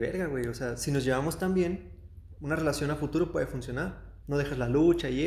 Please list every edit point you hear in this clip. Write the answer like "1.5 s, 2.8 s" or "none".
2.4 s, 4.2 s